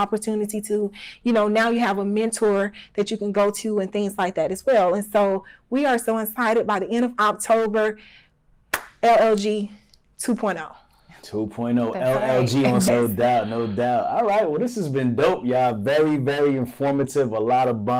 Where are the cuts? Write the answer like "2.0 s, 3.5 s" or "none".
12.9 s